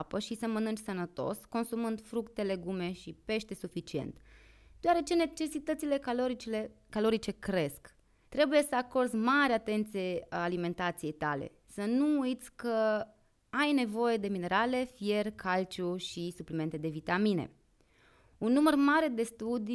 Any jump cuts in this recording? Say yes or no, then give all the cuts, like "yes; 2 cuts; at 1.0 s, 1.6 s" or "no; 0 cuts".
yes; 1 cut; at 8.2 s